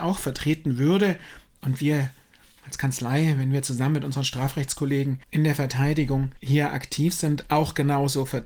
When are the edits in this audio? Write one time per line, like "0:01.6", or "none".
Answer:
0:05.2
0:06.4